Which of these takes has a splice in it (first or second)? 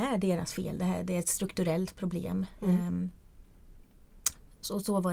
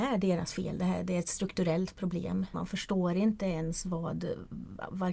second